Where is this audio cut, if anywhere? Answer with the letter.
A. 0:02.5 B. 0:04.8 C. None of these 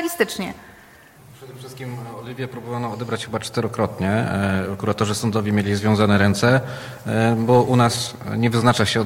C